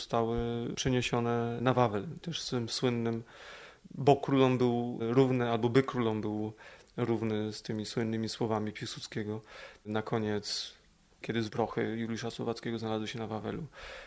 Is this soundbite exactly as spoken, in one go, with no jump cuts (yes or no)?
yes